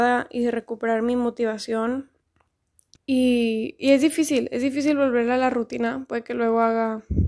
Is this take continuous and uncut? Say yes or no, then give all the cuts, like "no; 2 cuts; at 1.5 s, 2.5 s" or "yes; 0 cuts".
no; 1 cut; at 3.0 s